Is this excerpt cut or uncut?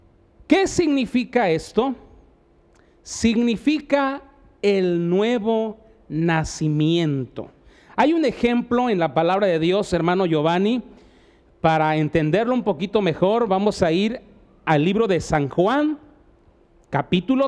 uncut